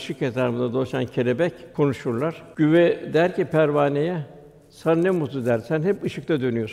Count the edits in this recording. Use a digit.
0